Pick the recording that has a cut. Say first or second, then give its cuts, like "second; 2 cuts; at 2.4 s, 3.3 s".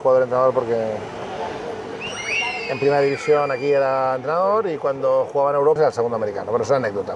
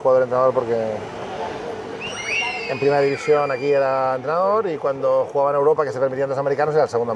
first; 1 cut; at 5.8 s